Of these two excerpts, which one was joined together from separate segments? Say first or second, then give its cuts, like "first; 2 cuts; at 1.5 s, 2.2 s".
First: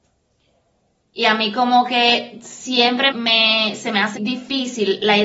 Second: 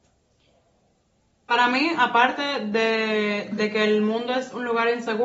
first; 3 cuts; at 1.0 s, 3.1 s, 4.2 s